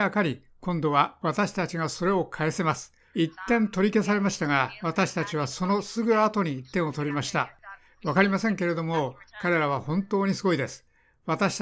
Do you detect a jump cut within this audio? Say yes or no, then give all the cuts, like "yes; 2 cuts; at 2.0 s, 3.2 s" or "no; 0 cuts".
yes; 2 cuts; at 3.1 s, 8.0 s